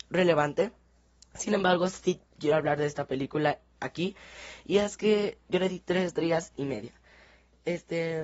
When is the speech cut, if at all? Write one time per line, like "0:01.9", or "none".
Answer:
none